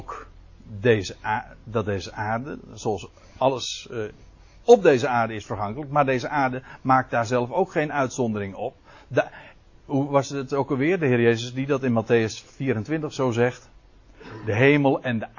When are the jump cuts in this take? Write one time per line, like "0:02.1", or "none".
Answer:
none